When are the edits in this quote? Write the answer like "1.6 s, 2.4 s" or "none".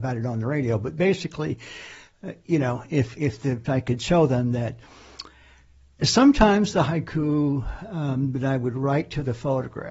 3.7 s